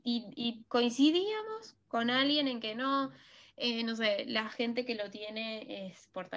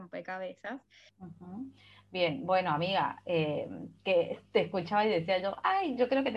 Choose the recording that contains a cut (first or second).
second